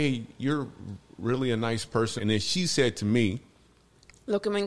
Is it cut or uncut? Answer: cut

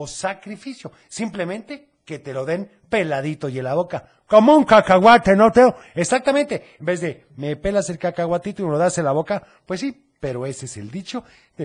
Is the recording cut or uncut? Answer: cut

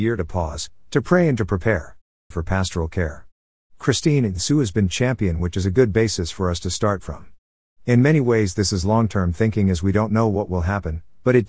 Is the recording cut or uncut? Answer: cut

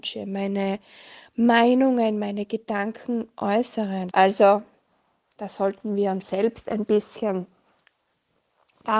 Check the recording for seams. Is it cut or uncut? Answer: cut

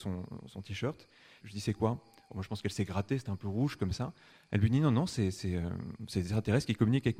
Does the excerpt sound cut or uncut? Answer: cut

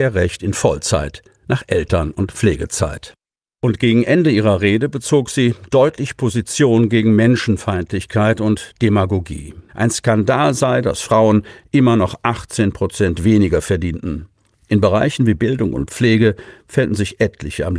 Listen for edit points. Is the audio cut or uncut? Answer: cut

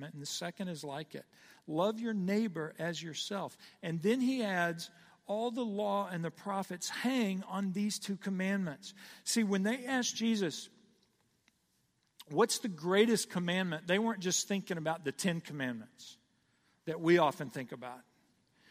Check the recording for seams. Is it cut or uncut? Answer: uncut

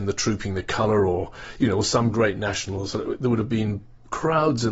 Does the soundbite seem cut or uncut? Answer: uncut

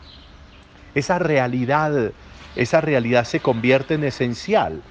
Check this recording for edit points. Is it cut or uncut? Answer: uncut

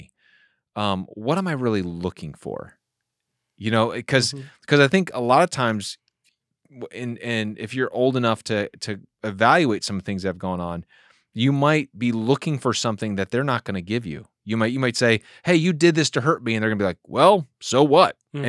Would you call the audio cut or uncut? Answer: uncut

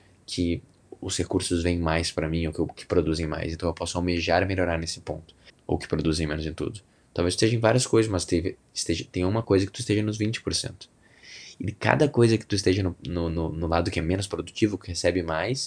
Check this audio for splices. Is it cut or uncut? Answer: cut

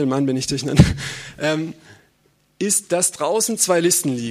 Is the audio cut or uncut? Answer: uncut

